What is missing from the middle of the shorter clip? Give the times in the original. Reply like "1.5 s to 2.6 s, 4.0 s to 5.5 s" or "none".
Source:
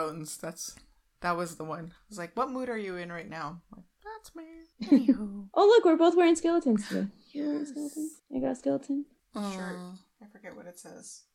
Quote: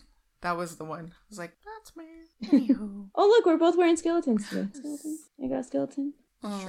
2.3 s to 3.9 s, 7.1 s to 7.7 s